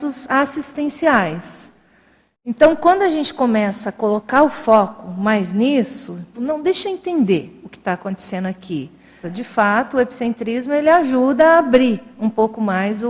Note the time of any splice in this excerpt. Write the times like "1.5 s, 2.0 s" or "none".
6.3 s, 9.2 s